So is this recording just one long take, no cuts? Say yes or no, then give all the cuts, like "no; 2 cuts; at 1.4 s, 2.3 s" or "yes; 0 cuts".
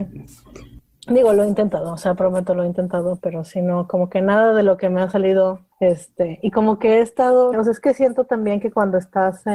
no; 2 cuts; at 5.7 s, 7.5 s